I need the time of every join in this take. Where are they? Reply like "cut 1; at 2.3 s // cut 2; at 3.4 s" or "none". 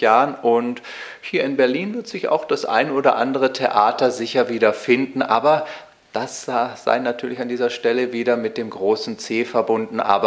none